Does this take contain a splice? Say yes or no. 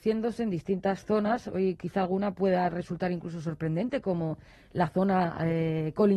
no